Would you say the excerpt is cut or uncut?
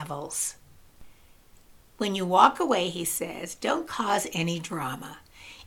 uncut